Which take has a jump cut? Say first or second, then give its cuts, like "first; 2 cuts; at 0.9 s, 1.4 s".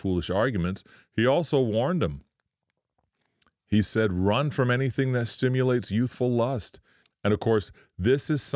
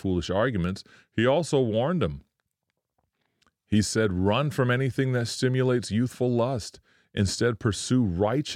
first; 1 cut; at 7.0 s